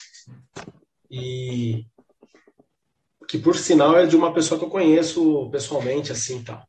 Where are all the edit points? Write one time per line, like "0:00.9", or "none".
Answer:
none